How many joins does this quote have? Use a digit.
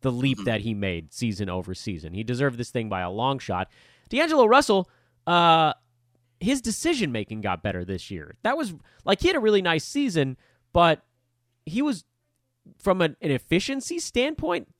0